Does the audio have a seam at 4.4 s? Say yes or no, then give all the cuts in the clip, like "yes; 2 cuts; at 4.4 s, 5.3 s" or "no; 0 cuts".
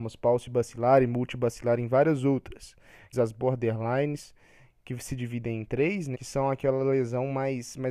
no; 2 cuts; at 3.1 s, 6.1 s